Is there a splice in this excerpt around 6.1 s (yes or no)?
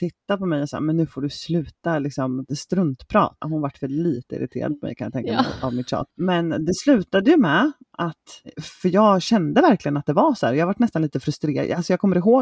yes